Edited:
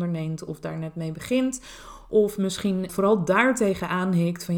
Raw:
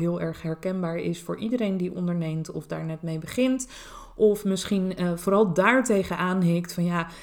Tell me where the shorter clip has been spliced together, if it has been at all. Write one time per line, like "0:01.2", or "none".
0:02.9